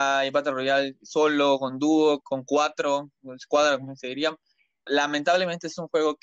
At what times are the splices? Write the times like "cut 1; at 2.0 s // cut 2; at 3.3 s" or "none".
cut 1; at 2.2 s // cut 2; at 4.9 s